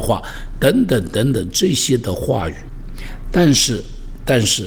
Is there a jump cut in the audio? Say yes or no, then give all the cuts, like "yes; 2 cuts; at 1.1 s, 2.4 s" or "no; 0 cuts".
no; 0 cuts